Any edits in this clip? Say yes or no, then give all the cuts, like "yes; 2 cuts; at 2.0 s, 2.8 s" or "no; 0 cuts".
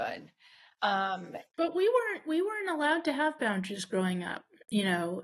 no; 0 cuts